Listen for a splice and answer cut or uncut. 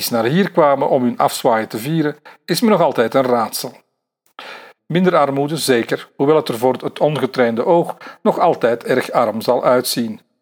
cut